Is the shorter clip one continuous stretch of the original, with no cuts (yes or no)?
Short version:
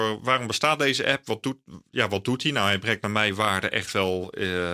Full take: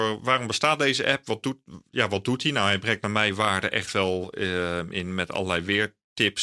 yes